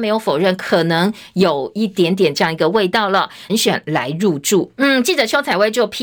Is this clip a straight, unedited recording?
no; 1 cut; at 3.5 s

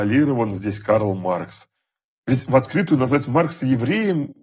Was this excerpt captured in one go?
yes; 0 cuts

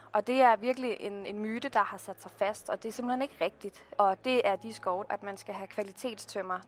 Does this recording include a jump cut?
yes; 2 cuts; at 3.9 s, 5.0 s

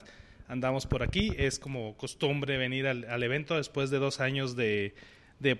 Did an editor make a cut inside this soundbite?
no; 0 cuts

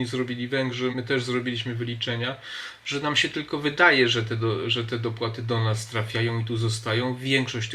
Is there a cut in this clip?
yes; 1 cut; at 0.9 s

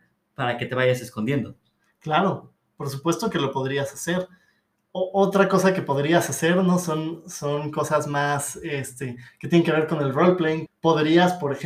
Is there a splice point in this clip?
yes; 1 cut; at 10.7 s

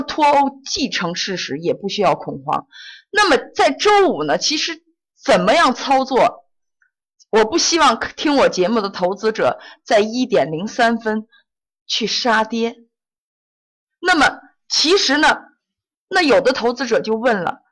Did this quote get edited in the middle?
no; 0 cuts

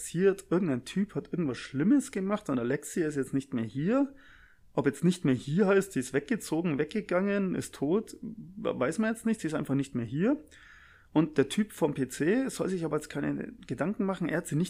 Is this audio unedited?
yes; 0 cuts

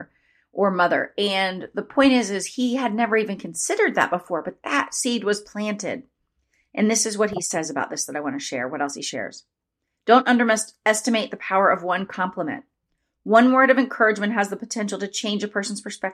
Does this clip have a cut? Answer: no; 0 cuts

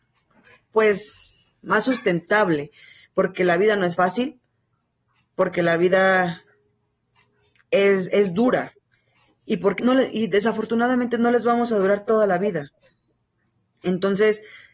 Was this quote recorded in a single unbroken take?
no; 1 cut; at 9.8 s

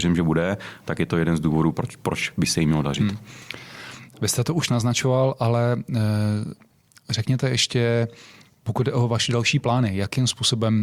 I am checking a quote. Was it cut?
yes; 1 cut; at 1.7 s

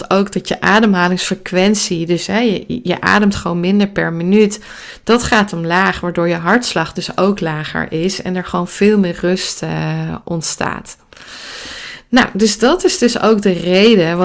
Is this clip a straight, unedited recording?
no; 1 cut; at 2.8 s

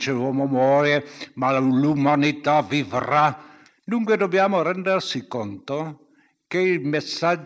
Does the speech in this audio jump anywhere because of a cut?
yes; 1 cut; at 3.7 s

